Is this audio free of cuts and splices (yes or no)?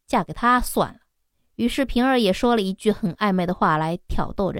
yes